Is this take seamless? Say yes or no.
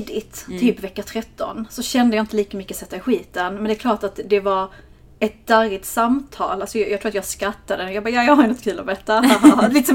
yes